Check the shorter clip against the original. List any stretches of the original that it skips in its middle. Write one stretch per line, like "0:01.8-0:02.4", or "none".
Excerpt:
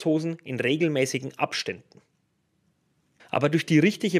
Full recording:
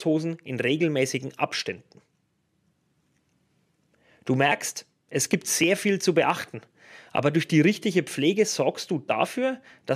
0:03.2-0:07.0